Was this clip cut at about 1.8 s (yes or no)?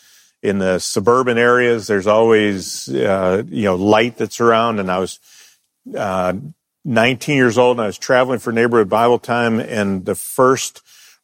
no